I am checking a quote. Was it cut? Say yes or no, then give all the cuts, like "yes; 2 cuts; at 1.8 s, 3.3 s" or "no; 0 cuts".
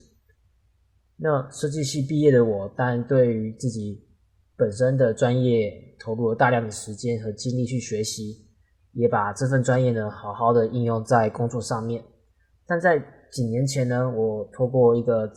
no; 0 cuts